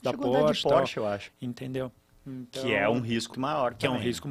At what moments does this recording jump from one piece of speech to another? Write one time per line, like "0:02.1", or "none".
0:01.3
0:03.3